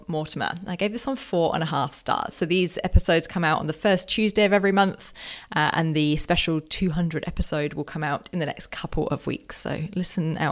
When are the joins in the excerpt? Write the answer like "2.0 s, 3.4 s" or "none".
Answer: 2.3 s